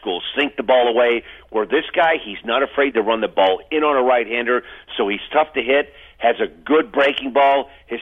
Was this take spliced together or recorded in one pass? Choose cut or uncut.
uncut